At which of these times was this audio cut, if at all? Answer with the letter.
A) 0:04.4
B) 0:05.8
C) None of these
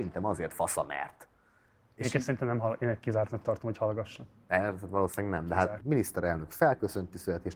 B